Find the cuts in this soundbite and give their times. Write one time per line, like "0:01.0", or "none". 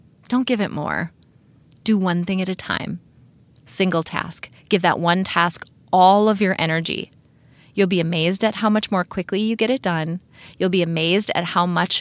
none